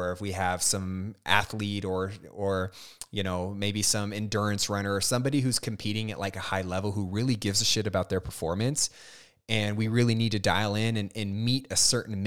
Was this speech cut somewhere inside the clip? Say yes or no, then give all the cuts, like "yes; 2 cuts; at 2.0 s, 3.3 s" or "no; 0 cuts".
no; 0 cuts